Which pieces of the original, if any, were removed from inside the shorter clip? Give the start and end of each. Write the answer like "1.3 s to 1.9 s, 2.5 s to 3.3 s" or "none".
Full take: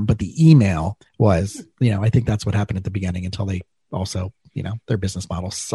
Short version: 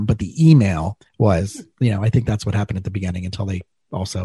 none